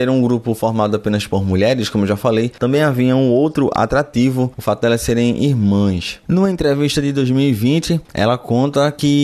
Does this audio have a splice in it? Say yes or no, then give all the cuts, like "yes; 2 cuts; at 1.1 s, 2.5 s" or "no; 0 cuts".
no; 0 cuts